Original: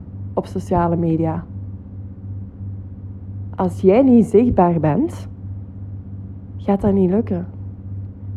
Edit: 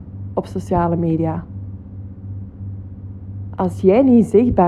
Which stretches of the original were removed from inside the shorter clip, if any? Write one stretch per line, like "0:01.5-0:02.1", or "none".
none